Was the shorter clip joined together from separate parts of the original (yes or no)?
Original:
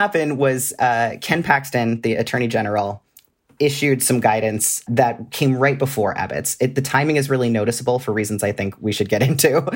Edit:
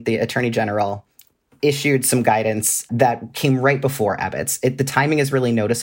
no